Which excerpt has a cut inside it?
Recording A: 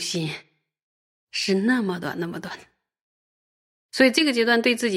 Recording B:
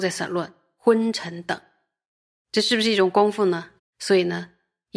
B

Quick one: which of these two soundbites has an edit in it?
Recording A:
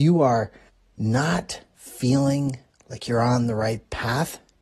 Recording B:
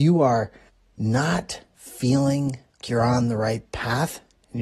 B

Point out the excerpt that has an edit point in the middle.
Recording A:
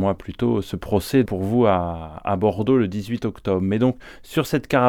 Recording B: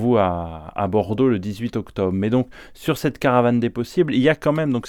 A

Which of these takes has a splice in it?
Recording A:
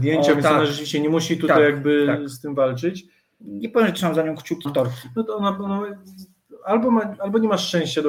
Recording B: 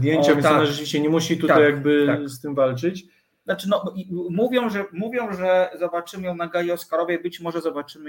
A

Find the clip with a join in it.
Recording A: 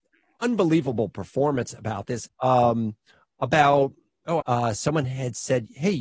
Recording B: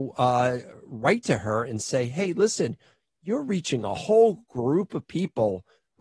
A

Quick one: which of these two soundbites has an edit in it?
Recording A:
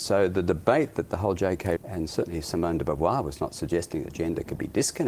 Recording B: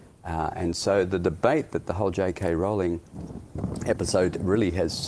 A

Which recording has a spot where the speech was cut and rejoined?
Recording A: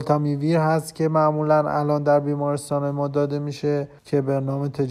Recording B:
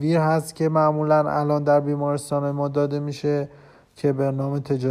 A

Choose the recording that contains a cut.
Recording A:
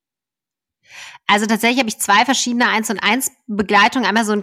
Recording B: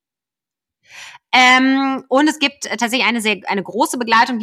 B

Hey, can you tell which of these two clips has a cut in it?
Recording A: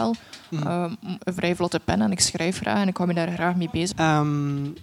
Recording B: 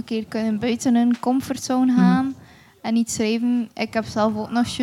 A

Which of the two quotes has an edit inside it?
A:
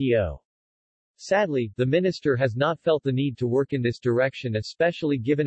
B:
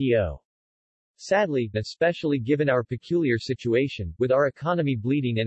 B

